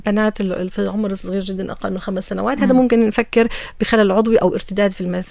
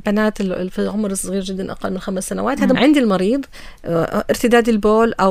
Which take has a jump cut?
second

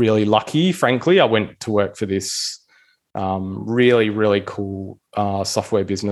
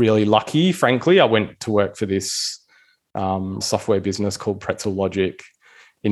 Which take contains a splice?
second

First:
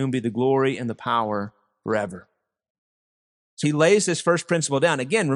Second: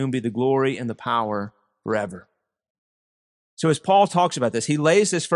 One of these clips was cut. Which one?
first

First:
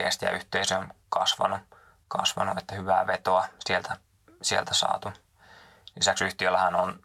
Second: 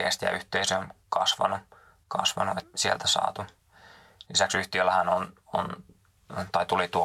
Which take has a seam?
second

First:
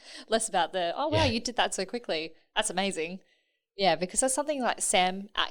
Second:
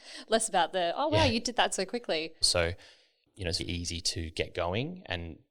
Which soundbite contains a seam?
second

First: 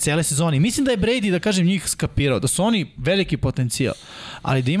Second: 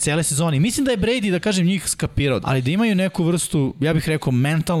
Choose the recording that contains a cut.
second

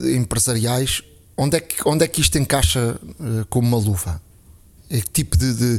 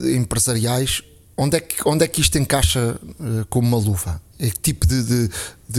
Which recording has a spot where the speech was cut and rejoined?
second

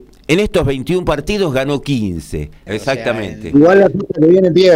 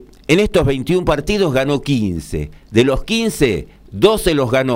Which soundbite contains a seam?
first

